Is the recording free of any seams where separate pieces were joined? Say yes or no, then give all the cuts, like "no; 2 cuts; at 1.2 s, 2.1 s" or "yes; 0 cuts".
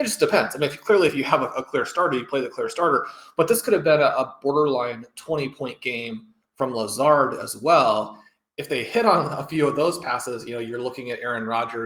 yes; 0 cuts